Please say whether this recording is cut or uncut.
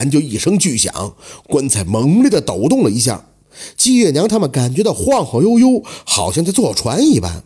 uncut